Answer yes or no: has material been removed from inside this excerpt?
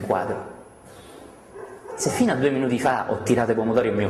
yes